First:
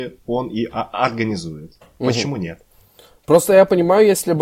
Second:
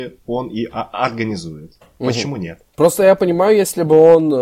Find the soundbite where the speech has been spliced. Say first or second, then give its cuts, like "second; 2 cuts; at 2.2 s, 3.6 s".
second; 1 cut; at 2.7 s